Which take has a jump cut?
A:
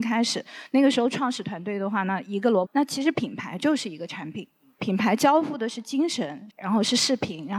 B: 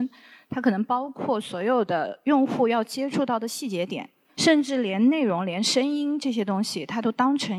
A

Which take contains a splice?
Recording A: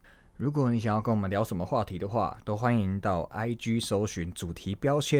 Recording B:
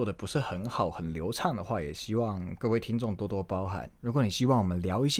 B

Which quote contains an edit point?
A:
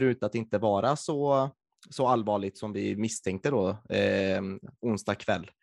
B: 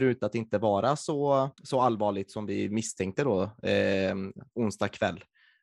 B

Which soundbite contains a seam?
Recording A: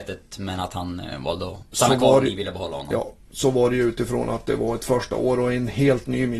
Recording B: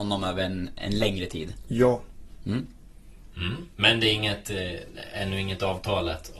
B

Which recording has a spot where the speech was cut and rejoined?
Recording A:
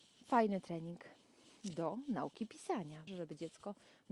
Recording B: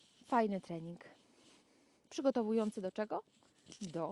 A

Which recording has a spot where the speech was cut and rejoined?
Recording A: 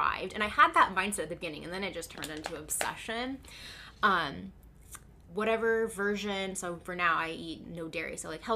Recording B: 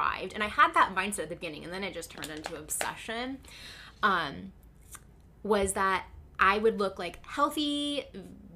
A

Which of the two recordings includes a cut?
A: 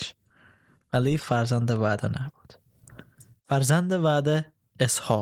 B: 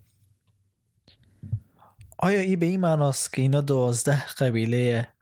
A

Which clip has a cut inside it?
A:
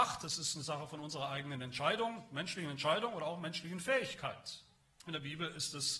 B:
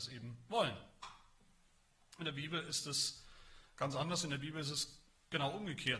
A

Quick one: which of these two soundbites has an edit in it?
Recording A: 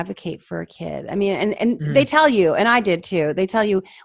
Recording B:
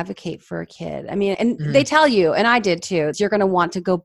B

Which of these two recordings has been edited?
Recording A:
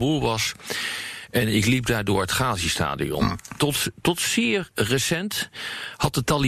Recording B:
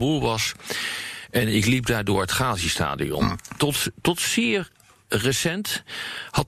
A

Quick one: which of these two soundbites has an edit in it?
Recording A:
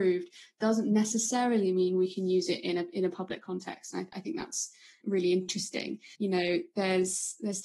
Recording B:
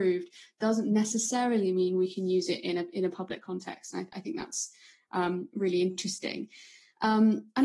A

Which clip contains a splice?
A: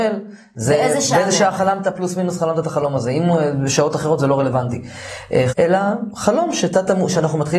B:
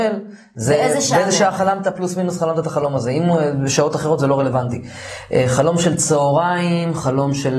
A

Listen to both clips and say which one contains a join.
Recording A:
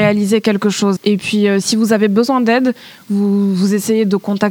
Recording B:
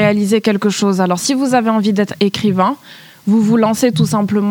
A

